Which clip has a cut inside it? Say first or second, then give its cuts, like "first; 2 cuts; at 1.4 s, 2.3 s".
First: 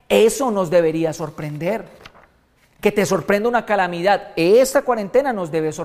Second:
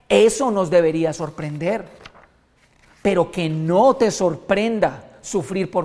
first; 1 cut; at 2.8 s